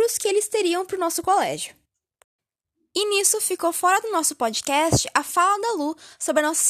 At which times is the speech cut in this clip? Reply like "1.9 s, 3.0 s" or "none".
none